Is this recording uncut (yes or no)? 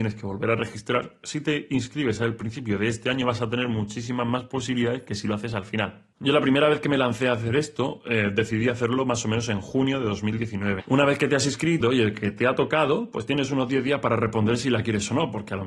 no